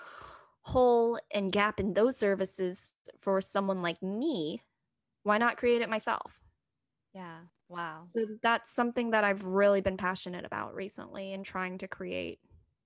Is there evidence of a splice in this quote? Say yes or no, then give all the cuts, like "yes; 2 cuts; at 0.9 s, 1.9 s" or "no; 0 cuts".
no; 0 cuts